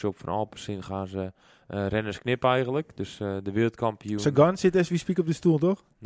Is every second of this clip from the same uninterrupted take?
yes; 0 cuts

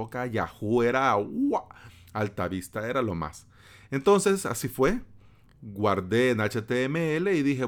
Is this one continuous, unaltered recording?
yes; 0 cuts

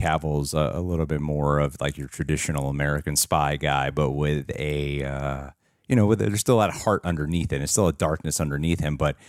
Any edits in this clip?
no; 0 cuts

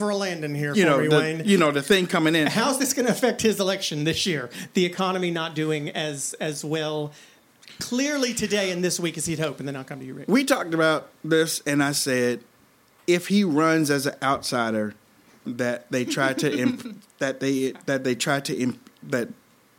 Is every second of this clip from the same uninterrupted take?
no; 1 cut; at 15.4 s

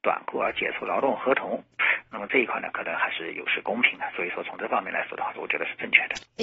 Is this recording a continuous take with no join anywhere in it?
no; 1 cut; at 5.3 s

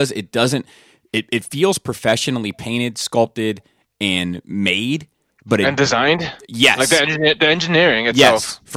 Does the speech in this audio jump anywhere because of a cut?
no; 0 cuts

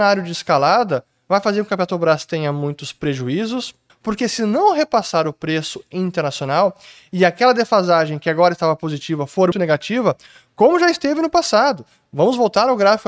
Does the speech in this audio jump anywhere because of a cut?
yes; 2 cuts; at 3.9 s, 9.5 s

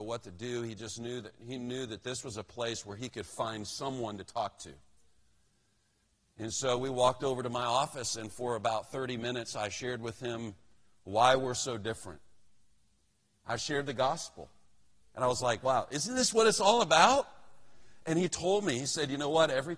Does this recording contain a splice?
no; 0 cuts

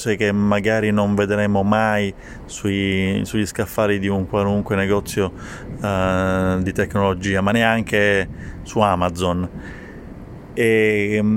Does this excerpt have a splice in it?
no; 0 cuts

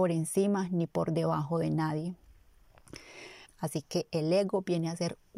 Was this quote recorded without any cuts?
no; 1 cut; at 3.4 s

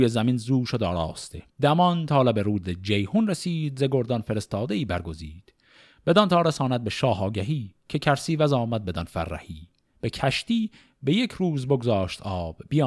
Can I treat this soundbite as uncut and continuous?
no; 1 cut; at 1.5 s

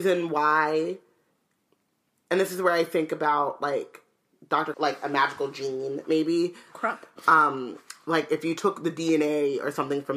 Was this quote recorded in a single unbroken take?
no; 2 cuts; at 4.7 s, 6.7 s

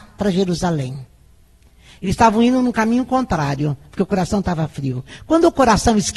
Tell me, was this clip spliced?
no; 0 cuts

